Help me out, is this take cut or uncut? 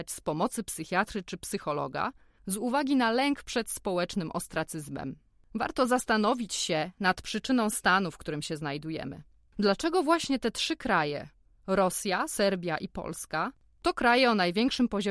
uncut